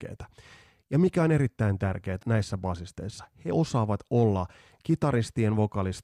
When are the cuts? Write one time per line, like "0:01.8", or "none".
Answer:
0:02.2